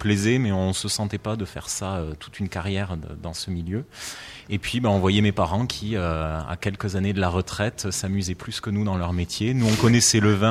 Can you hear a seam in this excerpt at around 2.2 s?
yes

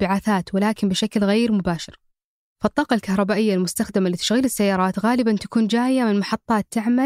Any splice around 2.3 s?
no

